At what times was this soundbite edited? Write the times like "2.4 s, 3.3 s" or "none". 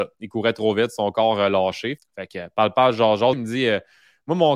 2.0 s, 3.3 s